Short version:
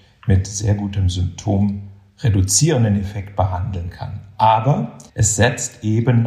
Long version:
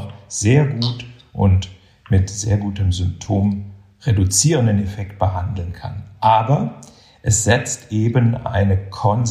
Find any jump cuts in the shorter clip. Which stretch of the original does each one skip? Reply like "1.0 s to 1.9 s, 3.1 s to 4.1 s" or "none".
6.9 s to 7.2 s